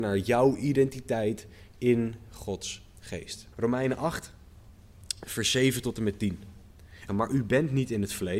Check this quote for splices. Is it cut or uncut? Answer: cut